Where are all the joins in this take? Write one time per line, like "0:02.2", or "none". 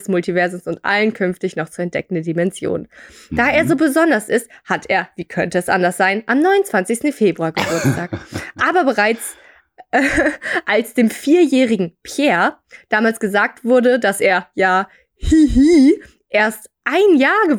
none